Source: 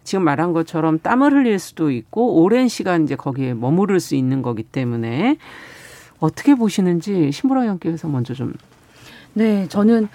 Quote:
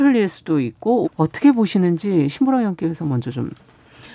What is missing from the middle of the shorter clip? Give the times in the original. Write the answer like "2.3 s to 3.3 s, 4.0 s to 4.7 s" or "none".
2.3 s to 6.1 s